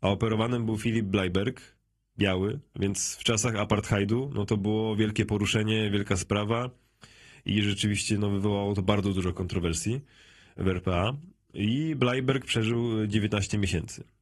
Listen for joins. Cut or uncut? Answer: uncut